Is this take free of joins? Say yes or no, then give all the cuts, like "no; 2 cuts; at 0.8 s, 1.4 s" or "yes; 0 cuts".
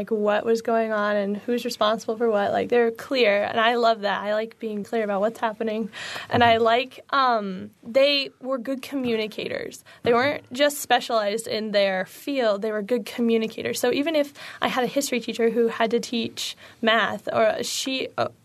no; 2 cuts; at 4.8 s, 7.8 s